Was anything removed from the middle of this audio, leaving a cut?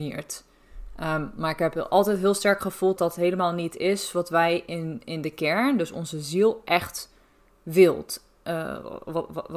yes; 1 cut; at 3.0 s

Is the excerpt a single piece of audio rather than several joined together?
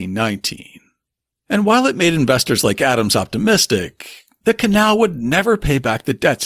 yes; 0 cuts

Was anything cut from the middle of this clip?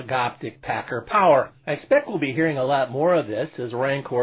no; 0 cuts

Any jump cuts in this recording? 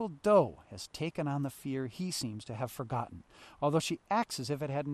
no; 0 cuts

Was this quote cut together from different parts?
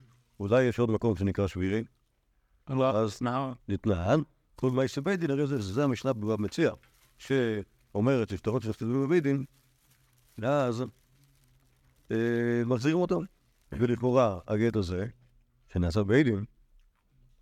yes; 1 cut; at 3.6 s

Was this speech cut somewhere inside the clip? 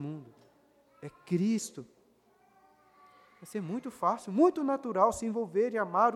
no; 0 cuts

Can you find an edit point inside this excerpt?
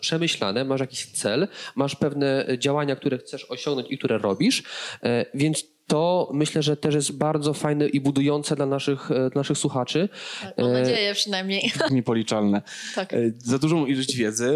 yes; 1 cut; at 11.9 s

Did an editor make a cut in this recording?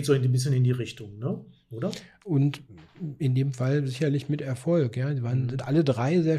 no; 0 cuts

